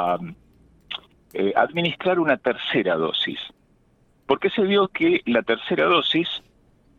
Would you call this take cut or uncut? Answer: uncut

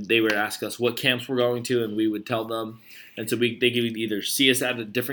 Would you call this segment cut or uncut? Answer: uncut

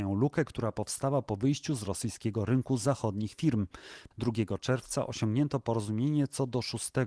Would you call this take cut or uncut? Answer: cut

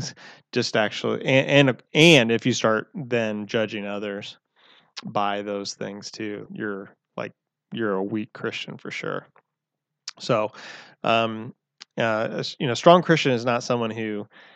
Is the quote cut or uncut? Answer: cut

